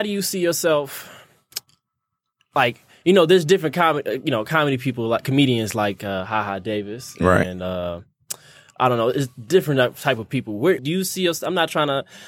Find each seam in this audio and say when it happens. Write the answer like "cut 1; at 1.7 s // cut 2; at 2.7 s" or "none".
cut 1; at 10.8 s